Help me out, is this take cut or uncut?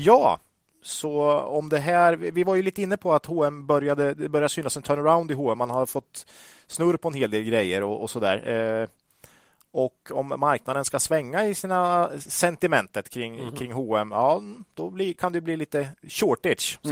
uncut